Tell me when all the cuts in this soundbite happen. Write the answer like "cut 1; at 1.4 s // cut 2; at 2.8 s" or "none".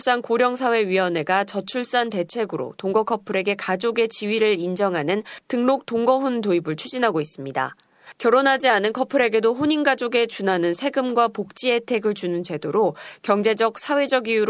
none

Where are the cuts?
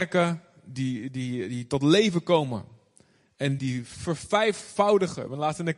cut 1; at 3.6 s

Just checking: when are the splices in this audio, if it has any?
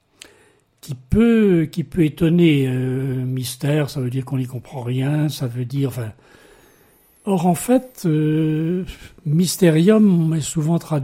none

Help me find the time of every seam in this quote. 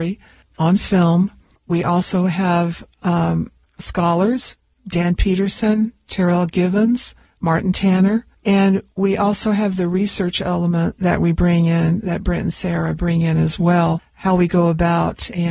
none

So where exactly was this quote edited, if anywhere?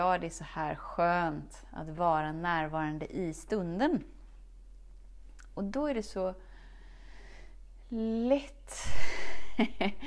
none

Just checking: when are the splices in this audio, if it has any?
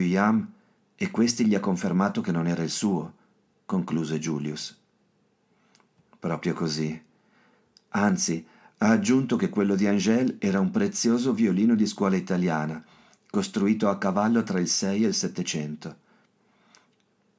none

